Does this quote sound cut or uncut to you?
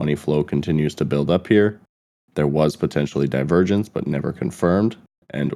uncut